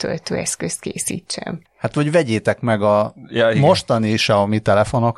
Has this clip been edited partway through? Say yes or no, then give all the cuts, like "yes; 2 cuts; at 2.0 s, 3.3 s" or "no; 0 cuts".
yes; 1 cut; at 1.7 s